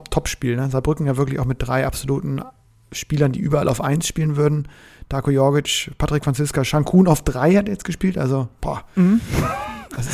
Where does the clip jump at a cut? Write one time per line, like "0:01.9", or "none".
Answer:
none